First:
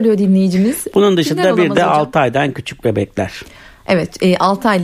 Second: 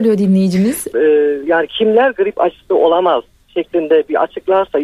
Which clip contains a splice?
second; 1 cut; at 0.9 s

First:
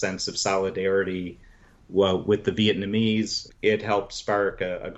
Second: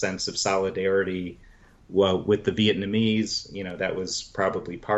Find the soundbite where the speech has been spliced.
first; 1 cut; at 3.5 s

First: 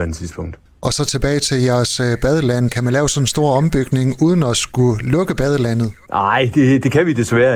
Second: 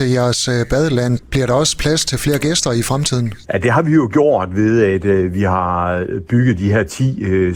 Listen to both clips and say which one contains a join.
second; 1 cut; at 1.2 s

